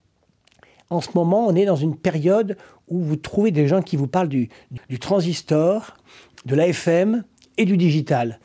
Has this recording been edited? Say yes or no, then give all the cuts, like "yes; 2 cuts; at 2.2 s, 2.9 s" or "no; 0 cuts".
yes; 1 cut; at 4.8 s